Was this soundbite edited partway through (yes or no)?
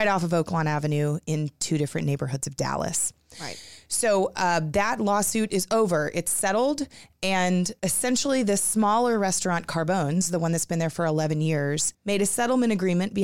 no